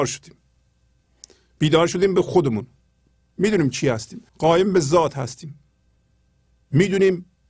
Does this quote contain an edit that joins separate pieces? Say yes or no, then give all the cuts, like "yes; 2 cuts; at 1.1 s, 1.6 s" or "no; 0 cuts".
yes; 1 cut; at 4.3 s